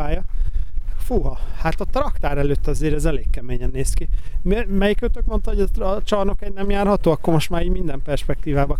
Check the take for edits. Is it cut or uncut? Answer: uncut